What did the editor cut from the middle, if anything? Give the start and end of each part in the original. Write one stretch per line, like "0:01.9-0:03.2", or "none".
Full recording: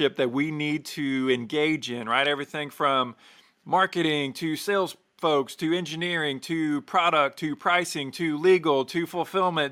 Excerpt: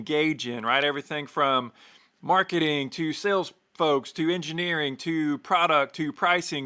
none